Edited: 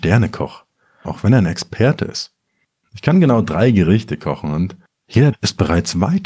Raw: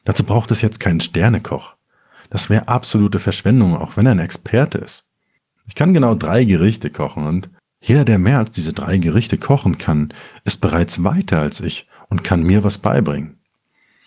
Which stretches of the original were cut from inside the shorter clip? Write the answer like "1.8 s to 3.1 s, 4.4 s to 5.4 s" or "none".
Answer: 2.2 s to 3.8 s, 8.0 s to 10.4 s